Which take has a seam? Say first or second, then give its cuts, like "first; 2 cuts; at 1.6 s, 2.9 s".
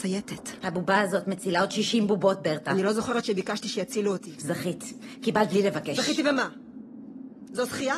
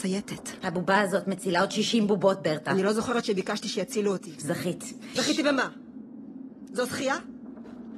second; 1 cut; at 5.2 s